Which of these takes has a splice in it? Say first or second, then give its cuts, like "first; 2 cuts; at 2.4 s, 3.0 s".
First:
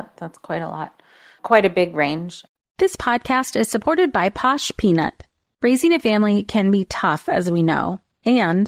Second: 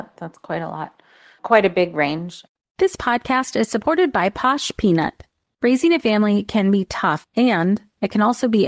second; 1 cut; at 7.2 s